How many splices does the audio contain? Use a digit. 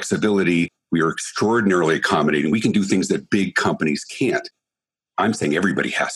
0